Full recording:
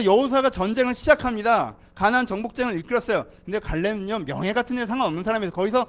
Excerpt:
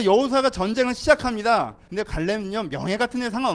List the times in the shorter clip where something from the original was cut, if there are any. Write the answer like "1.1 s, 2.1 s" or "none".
1.9 s